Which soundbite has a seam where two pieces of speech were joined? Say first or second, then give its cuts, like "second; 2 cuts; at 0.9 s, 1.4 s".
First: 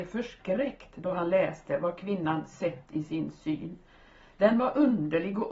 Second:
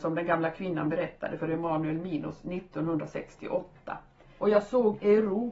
second; 1 cut; at 4.4 s